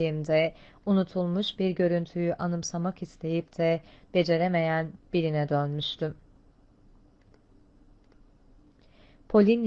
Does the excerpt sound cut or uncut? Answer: uncut